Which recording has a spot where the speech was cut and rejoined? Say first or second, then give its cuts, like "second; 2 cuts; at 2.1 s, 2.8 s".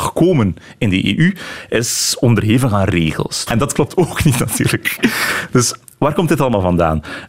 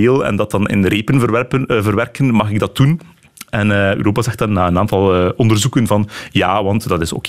first; 1 cut; at 3.5 s